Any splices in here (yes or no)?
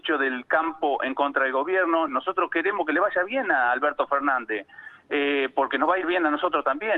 no